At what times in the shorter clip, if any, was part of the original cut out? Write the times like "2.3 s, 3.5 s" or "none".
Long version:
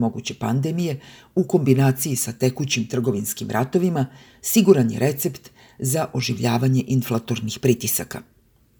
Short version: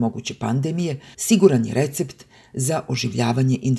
1.1 s